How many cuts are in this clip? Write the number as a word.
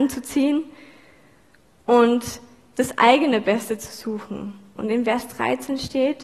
one